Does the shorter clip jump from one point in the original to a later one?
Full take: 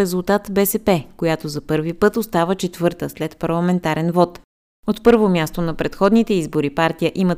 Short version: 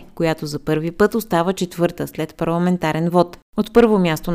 yes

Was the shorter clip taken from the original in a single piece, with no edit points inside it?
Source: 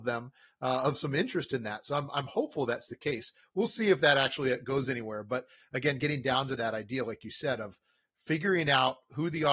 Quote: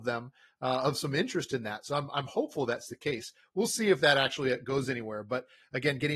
yes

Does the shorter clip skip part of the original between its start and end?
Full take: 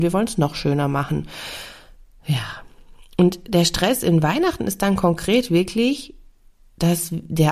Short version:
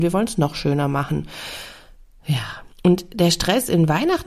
yes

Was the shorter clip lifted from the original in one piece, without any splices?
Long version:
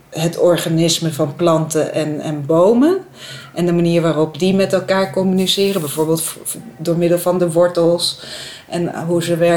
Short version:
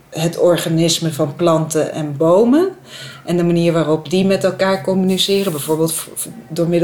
no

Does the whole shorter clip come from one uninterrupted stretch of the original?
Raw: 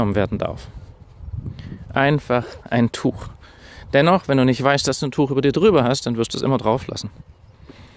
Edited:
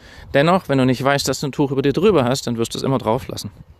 yes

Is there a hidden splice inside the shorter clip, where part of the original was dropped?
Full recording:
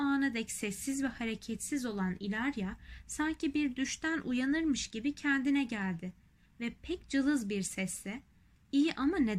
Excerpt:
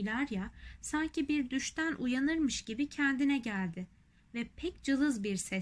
no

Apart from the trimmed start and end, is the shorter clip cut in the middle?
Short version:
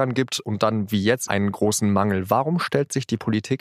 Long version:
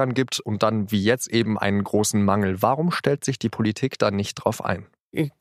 yes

